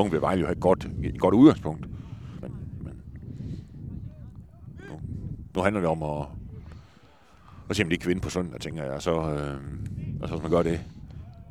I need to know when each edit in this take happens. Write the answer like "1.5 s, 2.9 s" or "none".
2.4 s